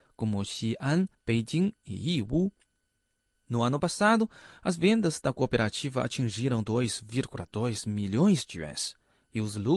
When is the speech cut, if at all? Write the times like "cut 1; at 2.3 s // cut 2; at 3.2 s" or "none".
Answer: cut 1; at 1.1 s